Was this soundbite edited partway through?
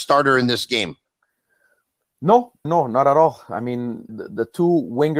yes; 2 cuts; at 2.7 s, 4.1 s

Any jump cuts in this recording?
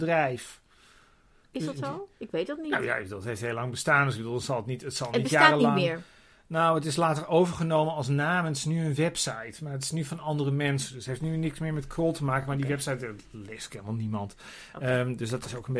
no; 0 cuts

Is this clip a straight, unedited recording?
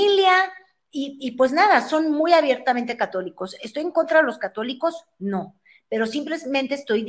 yes; 0 cuts

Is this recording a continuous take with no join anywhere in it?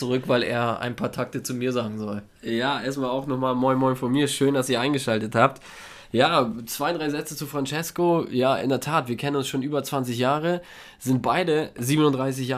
yes; 0 cuts

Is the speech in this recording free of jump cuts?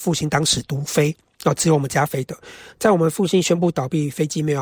yes; 0 cuts

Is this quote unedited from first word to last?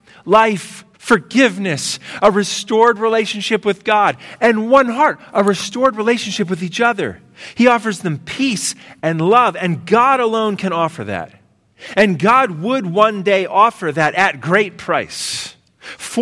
no; 1 cut; at 0.9 s

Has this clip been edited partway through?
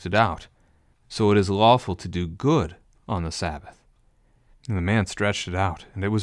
yes; 2 cuts; at 0.9 s, 4.5 s

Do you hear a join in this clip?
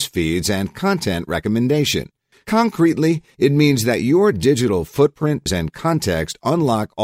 yes; 2 cuts; at 2.3 s, 5.5 s

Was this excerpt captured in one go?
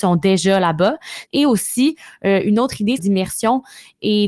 no; 2 cuts; at 1.3 s, 3.0 s

